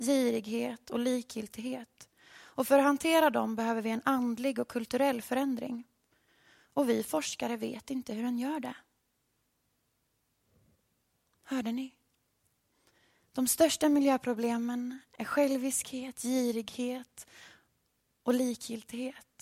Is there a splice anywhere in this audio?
no; 0 cuts

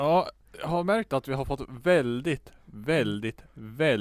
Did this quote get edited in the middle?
no; 0 cuts

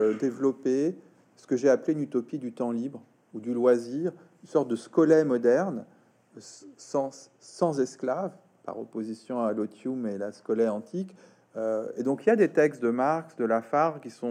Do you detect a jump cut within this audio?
no; 0 cuts

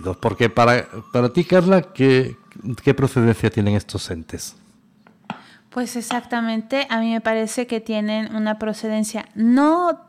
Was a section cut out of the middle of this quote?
no; 0 cuts

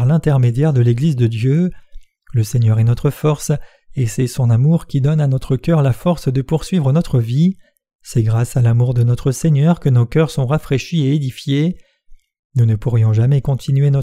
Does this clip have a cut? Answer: no; 0 cuts

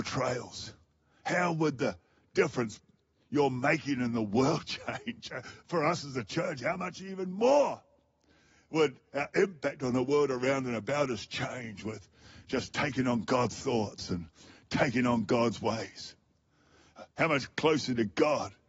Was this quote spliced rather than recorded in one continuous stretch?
no; 0 cuts

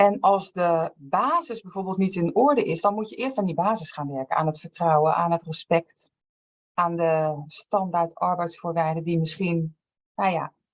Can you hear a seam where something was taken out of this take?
no; 0 cuts

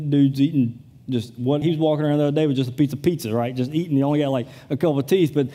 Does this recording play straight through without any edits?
no; 1 cut; at 1.6 s

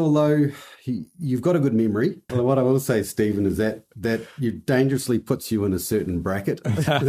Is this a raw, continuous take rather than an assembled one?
no; 1 cut; at 2.3 s

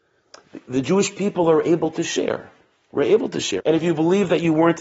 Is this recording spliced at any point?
yes; 1 cut; at 3.6 s

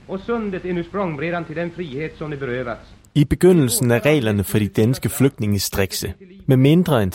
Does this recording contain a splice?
no; 0 cuts

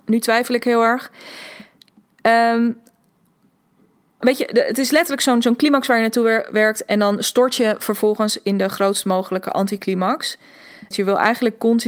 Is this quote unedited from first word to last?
no; 2 cuts; at 4.2 s, 10.9 s

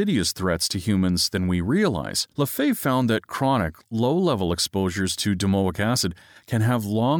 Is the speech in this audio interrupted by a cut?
yes; 1 cut; at 2.3 s

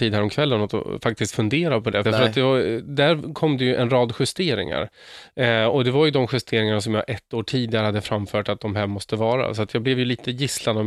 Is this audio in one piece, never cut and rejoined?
no; 1 cut; at 2.0 s

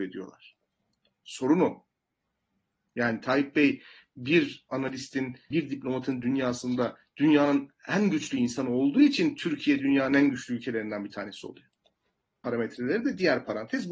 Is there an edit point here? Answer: yes; 2 cuts; at 5.5 s, 12.4 s

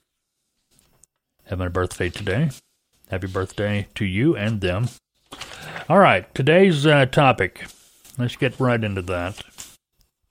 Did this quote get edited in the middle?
no; 0 cuts

